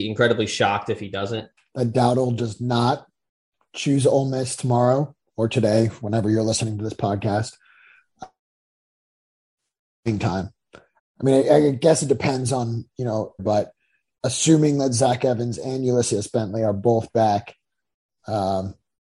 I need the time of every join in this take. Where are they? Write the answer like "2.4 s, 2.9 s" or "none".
1.6 s, 11.0 s, 13.4 s